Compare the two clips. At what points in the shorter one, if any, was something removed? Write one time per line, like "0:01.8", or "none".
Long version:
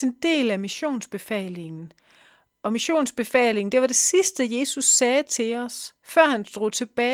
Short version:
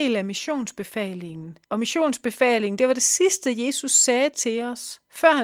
0:01.6